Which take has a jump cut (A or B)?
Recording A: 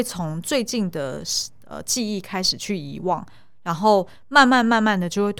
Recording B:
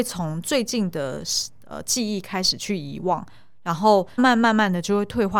B